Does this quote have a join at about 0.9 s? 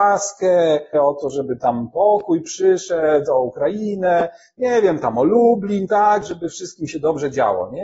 yes; 1 cut; at 0.9 s

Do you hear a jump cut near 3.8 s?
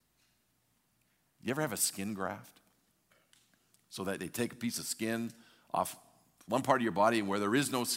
no; 0 cuts

